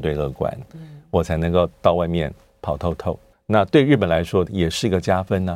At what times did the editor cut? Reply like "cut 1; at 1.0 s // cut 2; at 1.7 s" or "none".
cut 1; at 3.3 s // cut 2; at 4.5 s